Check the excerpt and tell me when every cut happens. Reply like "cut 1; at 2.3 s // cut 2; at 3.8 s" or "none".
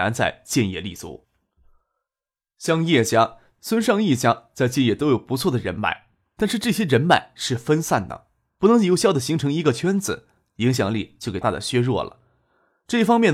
cut 1; at 11.4 s